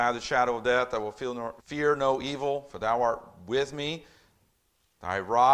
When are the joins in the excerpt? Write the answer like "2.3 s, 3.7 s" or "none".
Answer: 1.6 s